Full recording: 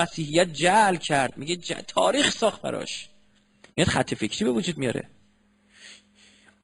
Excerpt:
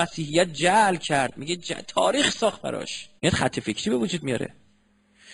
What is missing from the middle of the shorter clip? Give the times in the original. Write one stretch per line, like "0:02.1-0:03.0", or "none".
0:03.2-0:03.7